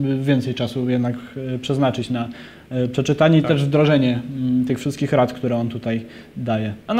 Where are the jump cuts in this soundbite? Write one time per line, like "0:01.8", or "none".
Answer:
none